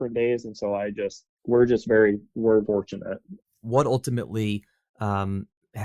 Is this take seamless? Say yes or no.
no